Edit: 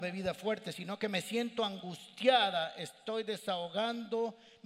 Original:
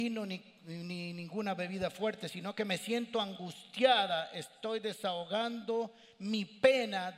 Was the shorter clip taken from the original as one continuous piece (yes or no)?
yes